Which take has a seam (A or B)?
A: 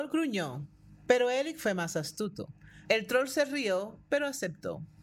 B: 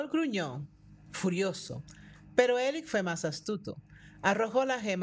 A